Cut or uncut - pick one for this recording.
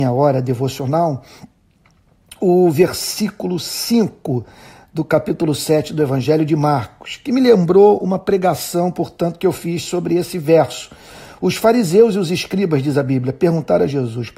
uncut